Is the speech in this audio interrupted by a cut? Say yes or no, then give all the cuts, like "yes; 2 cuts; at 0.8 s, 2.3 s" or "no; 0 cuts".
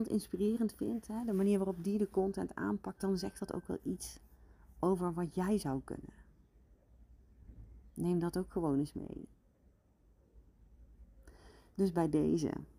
no; 0 cuts